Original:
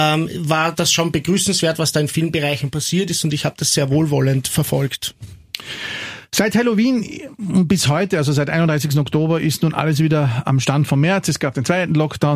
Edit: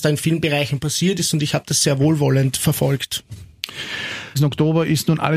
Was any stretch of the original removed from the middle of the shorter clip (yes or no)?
yes